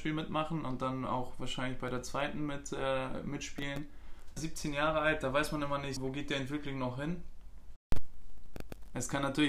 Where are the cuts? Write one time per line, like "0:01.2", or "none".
0:04.4
0:06.0

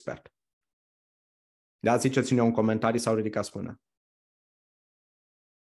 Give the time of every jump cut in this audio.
none

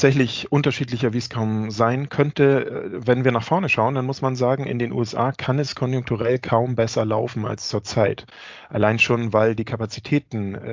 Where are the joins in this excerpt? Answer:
none

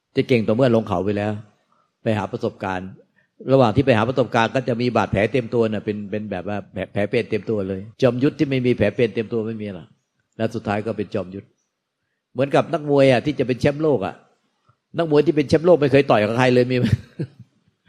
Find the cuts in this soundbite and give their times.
0:07.9

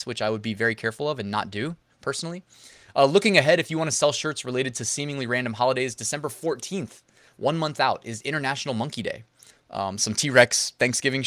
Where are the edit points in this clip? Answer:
0:09.5

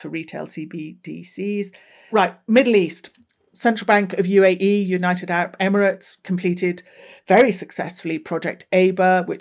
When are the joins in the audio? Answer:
0:02.1

